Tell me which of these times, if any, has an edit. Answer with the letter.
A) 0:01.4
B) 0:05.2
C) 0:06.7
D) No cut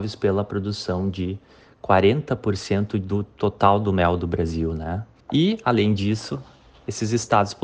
B